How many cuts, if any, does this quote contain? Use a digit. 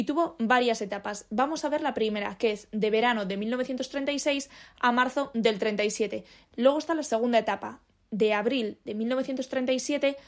1